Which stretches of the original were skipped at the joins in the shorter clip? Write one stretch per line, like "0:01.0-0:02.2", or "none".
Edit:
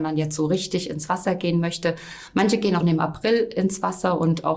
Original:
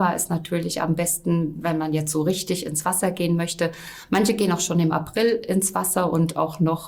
0:04.6-0:04.7